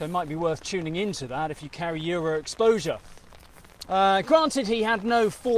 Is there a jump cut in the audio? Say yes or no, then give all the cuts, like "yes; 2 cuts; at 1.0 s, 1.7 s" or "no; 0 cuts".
yes; 1 cut; at 3.9 s